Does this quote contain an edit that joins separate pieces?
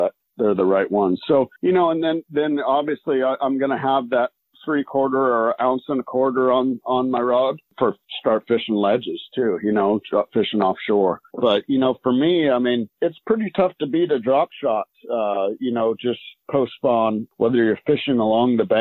yes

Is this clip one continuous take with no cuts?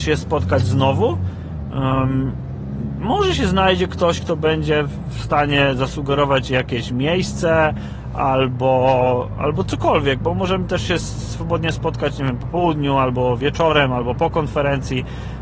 yes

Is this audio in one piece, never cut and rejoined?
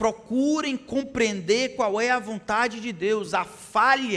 yes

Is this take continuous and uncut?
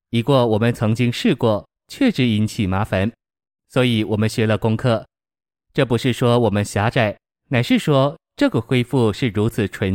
yes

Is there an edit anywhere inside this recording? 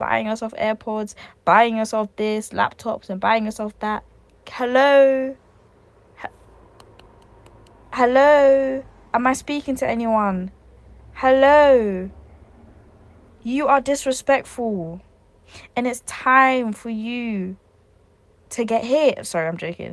no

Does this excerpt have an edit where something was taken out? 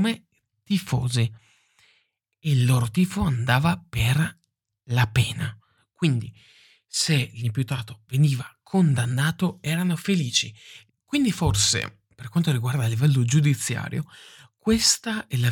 yes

